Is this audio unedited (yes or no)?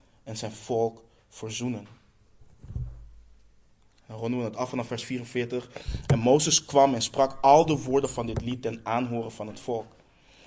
yes